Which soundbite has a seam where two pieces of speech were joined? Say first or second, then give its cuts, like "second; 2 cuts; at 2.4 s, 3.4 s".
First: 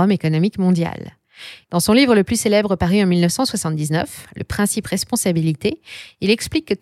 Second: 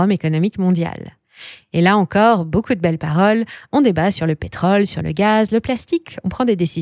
first; 1 cut; at 1.6 s